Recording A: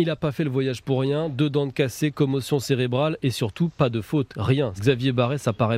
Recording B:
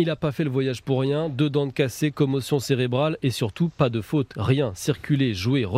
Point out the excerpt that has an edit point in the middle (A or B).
A